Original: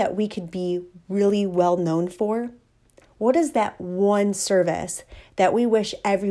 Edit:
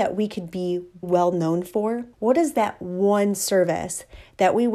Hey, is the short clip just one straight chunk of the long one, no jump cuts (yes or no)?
no